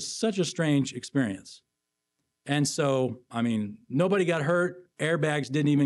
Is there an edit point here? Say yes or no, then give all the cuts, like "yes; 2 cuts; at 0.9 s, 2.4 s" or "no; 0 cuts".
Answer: no; 0 cuts